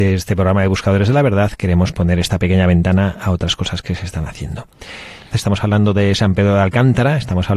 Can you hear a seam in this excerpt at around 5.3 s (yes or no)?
yes